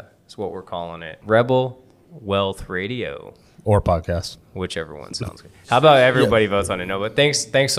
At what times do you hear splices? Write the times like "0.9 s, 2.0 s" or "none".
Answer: 1.2 s